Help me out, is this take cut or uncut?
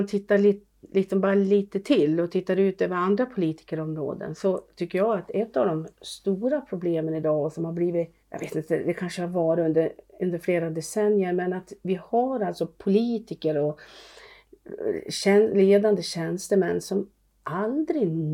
cut